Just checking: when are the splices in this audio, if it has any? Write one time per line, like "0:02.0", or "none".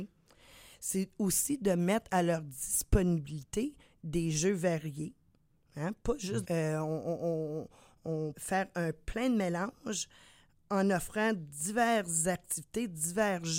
0:06.4
0:08.3